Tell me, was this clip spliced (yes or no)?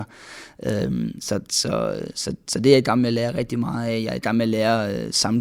no